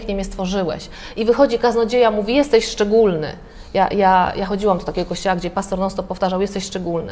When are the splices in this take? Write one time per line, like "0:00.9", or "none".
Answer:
none